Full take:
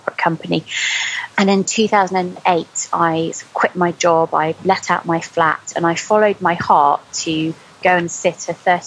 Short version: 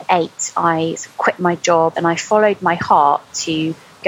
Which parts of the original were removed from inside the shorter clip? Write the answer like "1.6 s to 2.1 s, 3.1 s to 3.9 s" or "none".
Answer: 4.3 s to 5.7 s

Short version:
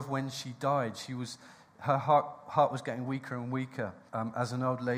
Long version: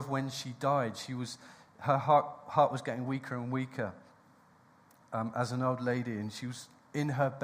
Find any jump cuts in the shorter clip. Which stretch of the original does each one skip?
4.1 s to 5.1 s

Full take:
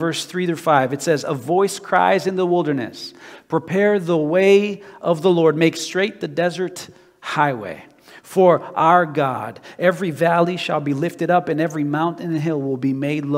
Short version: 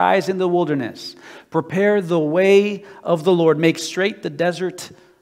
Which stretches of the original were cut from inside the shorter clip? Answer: none

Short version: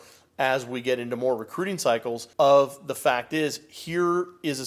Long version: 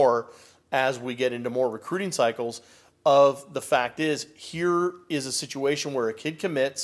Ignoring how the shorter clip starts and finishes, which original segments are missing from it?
2.7 s to 3.0 s

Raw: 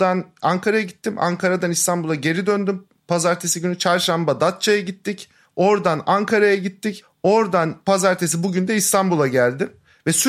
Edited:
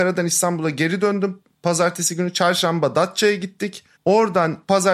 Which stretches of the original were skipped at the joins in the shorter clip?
5.4 s to 7.1 s

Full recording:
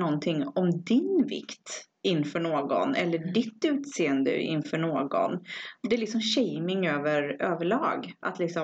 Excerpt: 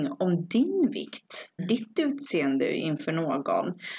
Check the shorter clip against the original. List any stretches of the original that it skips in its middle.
1.9 s to 3.2 s

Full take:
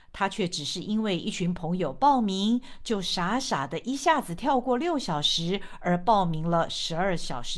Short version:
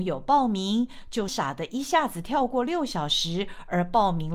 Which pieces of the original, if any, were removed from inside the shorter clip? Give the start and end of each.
3.0 s to 3.4 s

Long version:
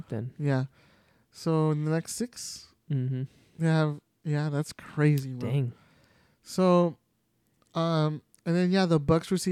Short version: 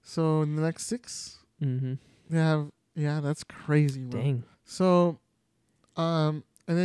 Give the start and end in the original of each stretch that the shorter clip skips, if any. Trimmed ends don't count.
5.8 s to 6.3 s

